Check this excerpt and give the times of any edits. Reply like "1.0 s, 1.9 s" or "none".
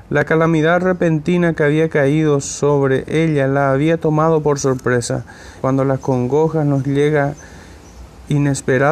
5.6 s

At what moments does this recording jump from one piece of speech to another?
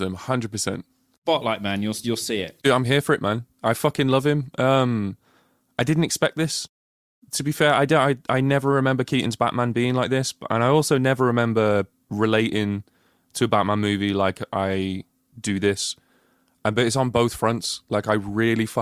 none

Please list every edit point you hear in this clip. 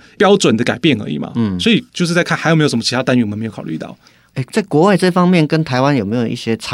none

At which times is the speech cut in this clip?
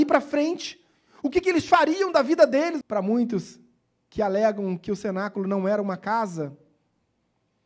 2.8 s

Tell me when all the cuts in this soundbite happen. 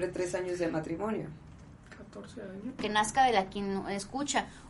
2.8 s

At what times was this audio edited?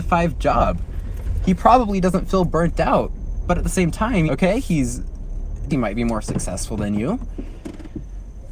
4.3 s, 5.7 s

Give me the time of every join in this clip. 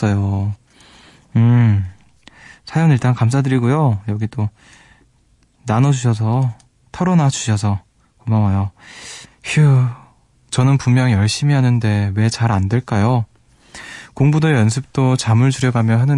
9.2 s

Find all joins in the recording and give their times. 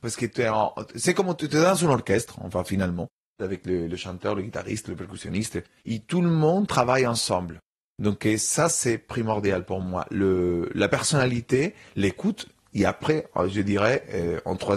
none

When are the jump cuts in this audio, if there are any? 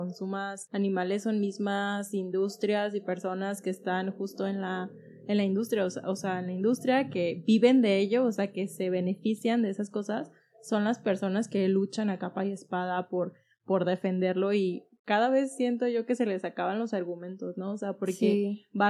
none

